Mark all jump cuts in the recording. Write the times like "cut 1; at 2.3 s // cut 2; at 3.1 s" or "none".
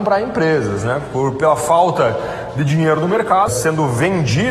cut 1; at 3.5 s